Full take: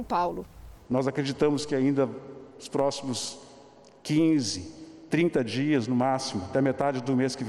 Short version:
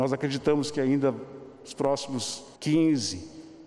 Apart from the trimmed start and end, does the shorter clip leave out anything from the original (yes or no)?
yes